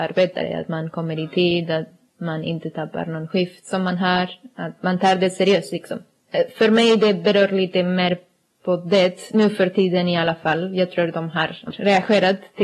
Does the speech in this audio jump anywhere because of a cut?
yes; 1 cut; at 11.7 s

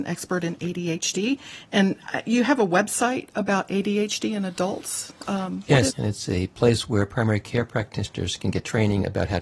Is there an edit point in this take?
yes; 1 cut; at 5.9 s

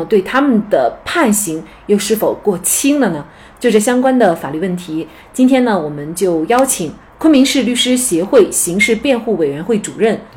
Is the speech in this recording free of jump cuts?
yes; 0 cuts

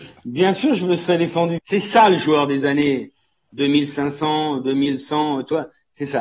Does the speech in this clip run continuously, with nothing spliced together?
no; 1 cut; at 1.6 s

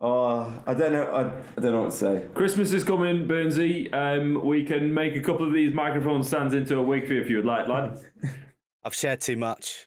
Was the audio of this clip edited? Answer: no; 0 cuts

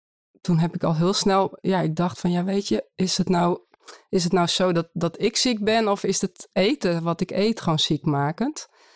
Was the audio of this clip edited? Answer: no; 0 cuts

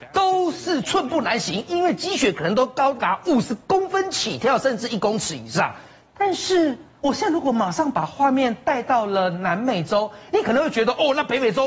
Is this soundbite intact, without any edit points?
yes; 0 cuts

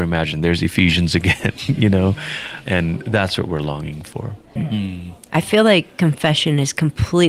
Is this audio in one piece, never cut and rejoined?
no; 1 cut; at 4.6 s

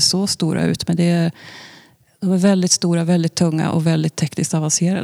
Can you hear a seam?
no; 0 cuts

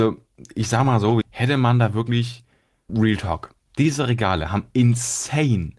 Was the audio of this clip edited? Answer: yes; 2 cuts; at 1.2 s, 2.9 s

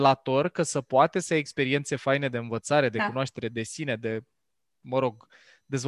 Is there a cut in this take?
no; 0 cuts

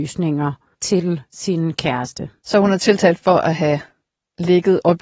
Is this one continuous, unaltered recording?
yes; 0 cuts

